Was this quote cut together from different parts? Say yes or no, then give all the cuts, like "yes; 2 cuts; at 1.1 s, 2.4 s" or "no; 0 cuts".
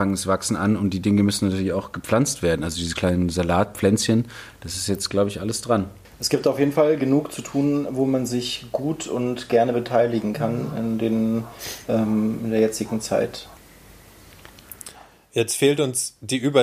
no; 0 cuts